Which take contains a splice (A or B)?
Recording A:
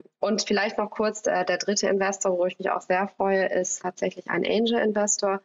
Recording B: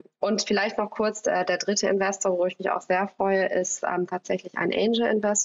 A